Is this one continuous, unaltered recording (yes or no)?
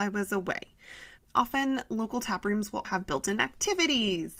no